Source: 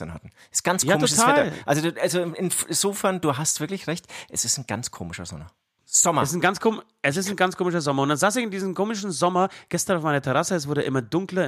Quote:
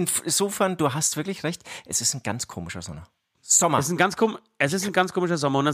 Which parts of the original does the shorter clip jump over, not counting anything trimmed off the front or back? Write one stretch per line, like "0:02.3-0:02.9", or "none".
none